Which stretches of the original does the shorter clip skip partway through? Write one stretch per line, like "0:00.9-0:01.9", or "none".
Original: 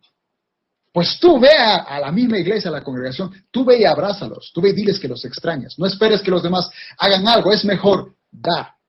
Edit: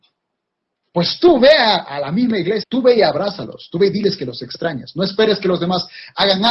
0:02.6-0:03.5